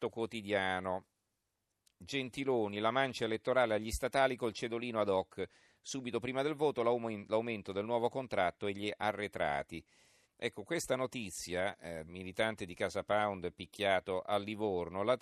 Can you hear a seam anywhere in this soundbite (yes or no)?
yes